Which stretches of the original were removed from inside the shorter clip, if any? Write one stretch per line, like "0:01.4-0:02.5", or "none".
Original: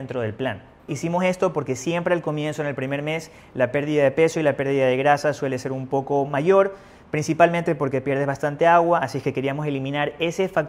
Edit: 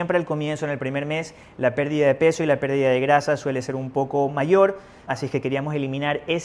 0:07.0-0:09.0